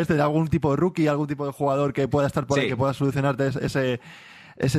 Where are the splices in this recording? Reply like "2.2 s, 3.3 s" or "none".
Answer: none